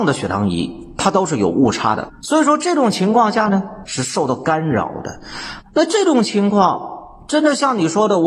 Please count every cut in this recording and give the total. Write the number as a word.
three